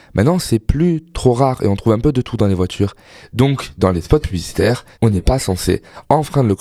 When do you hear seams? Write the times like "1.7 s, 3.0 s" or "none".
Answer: 3.2 s, 4.9 s